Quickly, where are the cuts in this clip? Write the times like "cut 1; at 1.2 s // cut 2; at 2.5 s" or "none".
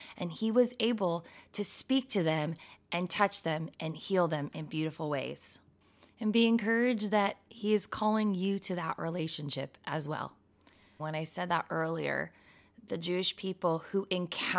cut 1; at 11.0 s